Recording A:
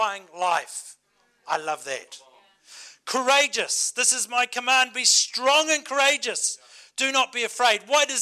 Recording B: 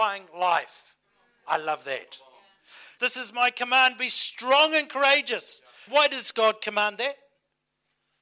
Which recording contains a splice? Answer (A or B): B